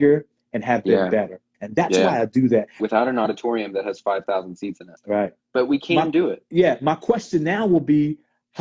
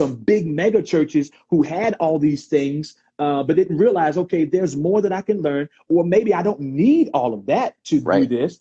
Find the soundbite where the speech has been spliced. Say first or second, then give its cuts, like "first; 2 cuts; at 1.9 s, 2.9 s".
first; 3 cuts; at 1.5 s, 2.8 s, 5.4 s